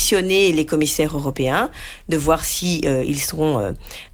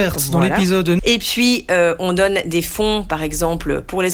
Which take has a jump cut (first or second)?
second